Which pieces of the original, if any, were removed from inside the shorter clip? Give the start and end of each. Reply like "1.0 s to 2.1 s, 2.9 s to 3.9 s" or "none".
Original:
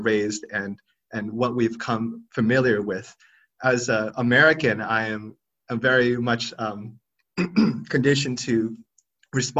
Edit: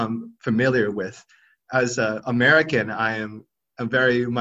none